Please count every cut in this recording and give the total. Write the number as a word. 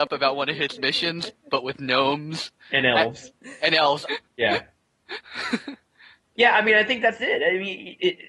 two